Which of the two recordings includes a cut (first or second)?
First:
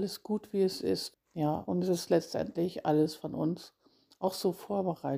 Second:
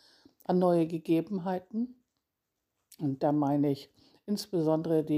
first